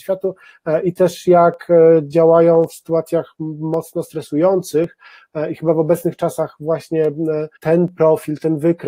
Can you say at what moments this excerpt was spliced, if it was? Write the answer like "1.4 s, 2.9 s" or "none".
7.6 s